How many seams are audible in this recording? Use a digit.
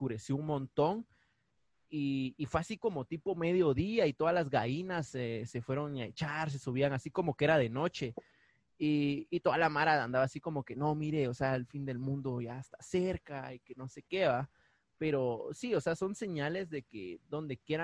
0